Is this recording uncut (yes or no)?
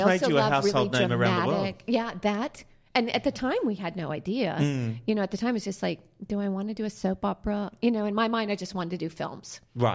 yes